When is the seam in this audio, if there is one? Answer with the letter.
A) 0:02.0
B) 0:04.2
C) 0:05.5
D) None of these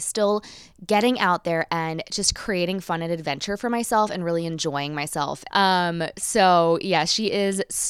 C